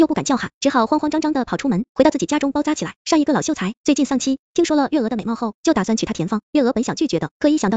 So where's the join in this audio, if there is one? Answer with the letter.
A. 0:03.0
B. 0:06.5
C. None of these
A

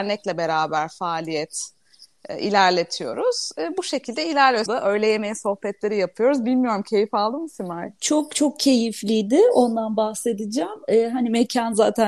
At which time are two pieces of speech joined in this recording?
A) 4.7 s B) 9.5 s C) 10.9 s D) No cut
A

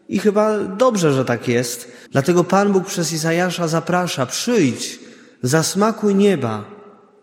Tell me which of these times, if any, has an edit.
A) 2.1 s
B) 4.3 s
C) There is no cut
A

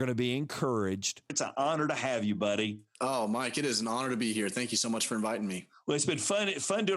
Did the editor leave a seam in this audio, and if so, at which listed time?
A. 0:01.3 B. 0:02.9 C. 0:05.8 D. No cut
A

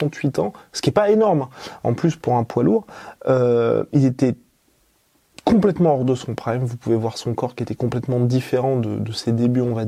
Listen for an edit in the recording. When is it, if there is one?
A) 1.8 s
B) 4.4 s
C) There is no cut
C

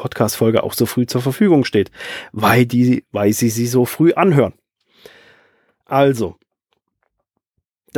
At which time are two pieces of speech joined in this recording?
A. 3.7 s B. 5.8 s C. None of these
C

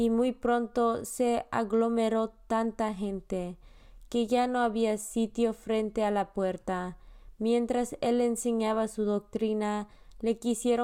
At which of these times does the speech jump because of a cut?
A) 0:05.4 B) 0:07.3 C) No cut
C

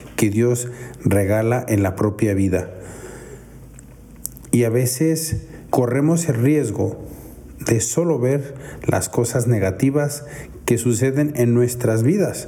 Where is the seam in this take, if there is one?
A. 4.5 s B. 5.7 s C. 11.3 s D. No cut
B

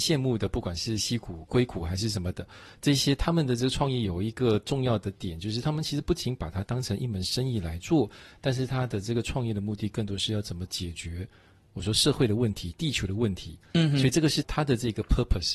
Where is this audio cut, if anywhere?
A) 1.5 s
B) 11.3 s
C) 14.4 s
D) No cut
C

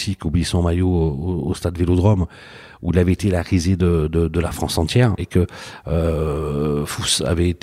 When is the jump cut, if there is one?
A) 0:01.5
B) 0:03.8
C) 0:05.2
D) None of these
C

